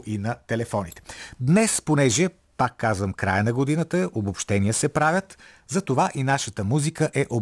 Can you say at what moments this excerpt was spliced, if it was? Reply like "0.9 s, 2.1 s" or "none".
1.4 s